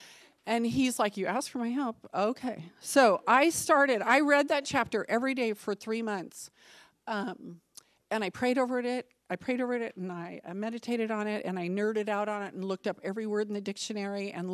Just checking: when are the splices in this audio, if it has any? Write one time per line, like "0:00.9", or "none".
none